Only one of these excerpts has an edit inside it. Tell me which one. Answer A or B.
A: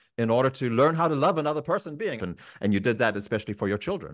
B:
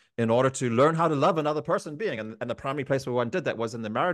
A